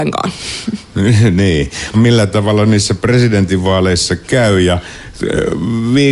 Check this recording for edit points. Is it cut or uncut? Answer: cut